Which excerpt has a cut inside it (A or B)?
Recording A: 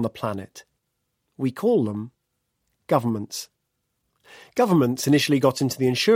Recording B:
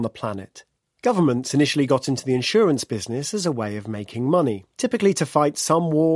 B